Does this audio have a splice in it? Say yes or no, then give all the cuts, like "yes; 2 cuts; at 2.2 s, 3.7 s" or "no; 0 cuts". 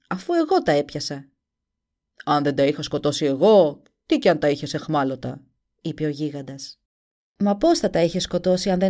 no; 0 cuts